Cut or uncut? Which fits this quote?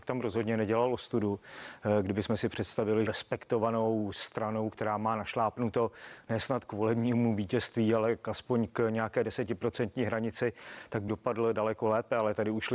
cut